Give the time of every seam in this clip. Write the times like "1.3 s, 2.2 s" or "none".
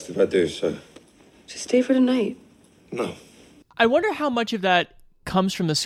3.6 s